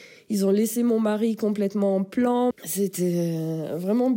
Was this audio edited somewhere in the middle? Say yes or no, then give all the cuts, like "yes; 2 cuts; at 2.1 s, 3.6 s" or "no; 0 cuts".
yes; 1 cut; at 2.5 s